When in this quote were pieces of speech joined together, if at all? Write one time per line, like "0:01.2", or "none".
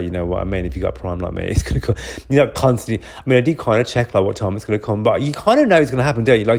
none